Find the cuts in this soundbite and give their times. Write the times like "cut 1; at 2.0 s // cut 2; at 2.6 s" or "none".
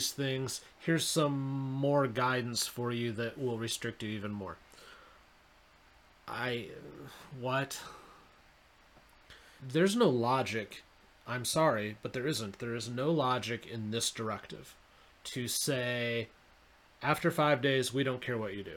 cut 1; at 9.6 s